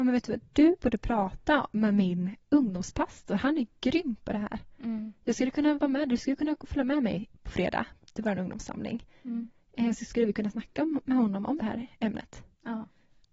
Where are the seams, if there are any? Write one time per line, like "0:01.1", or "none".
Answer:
0:11.6